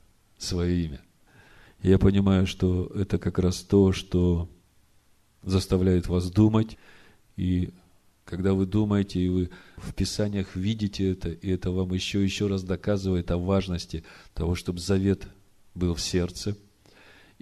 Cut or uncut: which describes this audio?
uncut